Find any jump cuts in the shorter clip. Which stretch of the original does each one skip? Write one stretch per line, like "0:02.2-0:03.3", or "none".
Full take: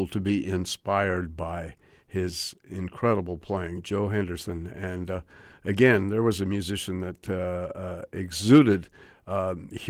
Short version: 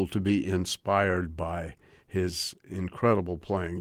none

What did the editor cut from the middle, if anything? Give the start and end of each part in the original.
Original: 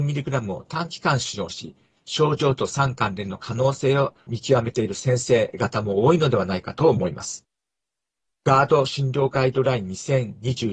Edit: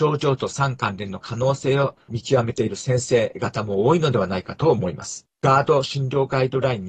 0:07.5-0:08.4

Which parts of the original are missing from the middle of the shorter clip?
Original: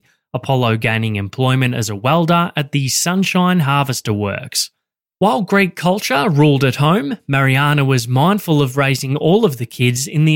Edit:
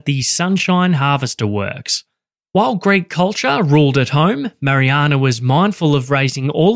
none

